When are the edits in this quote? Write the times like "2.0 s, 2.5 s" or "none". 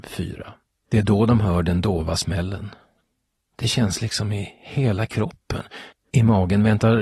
5.9 s